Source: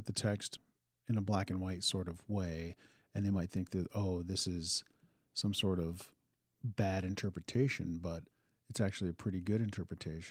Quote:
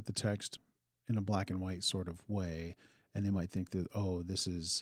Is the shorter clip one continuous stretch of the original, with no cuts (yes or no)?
yes